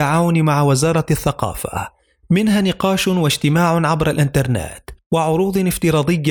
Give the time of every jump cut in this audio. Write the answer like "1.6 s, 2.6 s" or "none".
none